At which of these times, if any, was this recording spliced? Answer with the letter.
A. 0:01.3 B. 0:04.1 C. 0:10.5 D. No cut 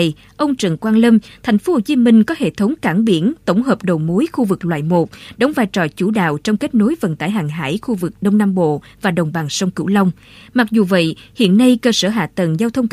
A